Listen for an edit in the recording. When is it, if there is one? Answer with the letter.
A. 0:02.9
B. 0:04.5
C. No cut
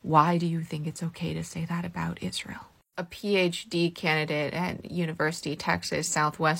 A